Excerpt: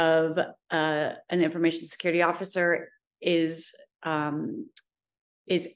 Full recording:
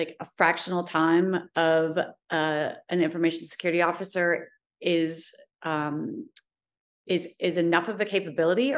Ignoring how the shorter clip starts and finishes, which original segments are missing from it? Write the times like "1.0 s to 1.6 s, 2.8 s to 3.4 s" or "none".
none